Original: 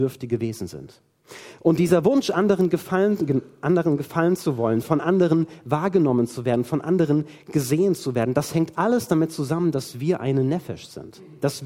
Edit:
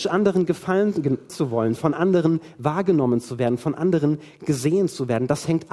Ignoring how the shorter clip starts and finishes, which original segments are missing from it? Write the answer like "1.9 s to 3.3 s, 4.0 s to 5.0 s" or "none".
3.5 s to 4.4 s